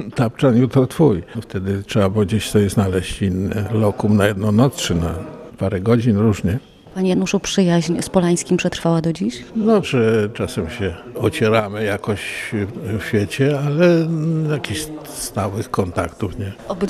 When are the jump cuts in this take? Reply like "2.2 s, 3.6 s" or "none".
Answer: 9.8 s

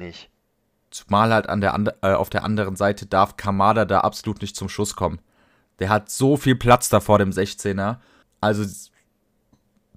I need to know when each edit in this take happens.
8.2 s

